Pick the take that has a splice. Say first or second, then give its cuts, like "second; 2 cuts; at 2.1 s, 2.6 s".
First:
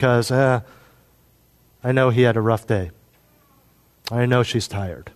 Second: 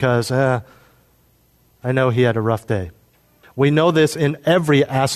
second; 1 cut; at 3.4 s